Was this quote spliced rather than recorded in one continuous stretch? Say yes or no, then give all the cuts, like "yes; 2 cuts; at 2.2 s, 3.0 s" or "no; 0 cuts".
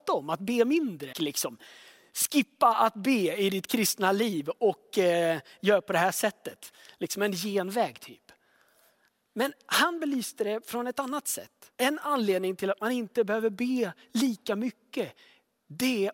yes; 2 cuts; at 1.1 s, 11.7 s